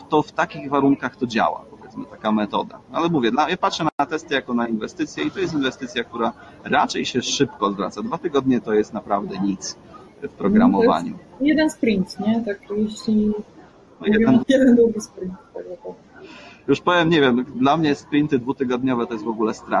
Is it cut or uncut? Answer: cut